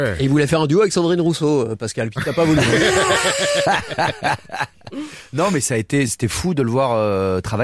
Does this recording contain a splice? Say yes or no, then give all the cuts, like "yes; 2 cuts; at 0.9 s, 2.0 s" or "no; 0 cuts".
no; 0 cuts